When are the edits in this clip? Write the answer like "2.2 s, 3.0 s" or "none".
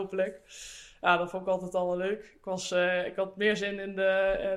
none